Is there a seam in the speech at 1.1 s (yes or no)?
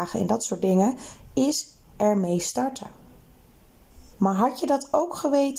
no